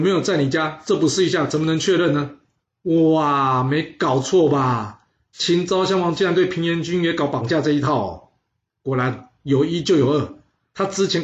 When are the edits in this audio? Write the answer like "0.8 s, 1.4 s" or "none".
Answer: 2.6 s